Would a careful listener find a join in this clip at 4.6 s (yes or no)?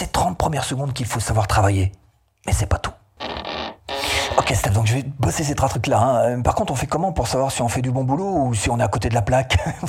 no